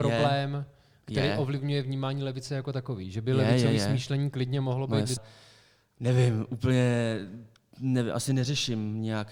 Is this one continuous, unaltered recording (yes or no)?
no